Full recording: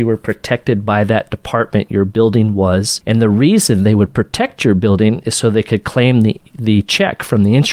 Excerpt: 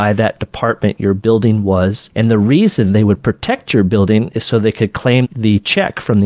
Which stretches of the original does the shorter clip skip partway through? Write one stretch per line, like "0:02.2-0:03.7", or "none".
0:06.1-0:06.5